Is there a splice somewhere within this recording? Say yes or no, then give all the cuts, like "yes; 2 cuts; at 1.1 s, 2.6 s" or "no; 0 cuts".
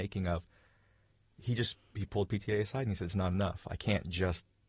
no; 0 cuts